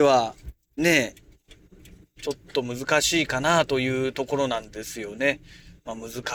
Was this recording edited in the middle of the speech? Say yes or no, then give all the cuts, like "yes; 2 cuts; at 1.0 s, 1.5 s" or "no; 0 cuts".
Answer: no; 0 cuts